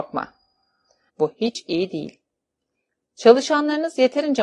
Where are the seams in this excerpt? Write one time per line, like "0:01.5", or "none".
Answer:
0:01.1